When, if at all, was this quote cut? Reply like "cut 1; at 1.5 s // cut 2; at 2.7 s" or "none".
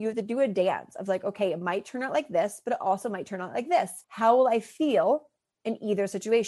cut 1; at 4.0 s